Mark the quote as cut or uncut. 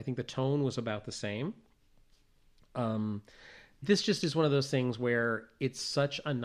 cut